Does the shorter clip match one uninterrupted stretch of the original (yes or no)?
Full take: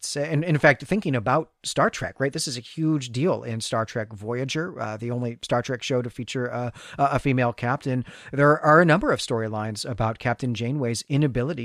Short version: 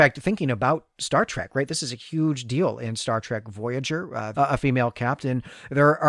no